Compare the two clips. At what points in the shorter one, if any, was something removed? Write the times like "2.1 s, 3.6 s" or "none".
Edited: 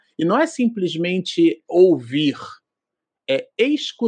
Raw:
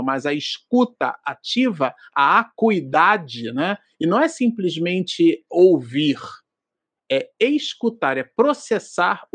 none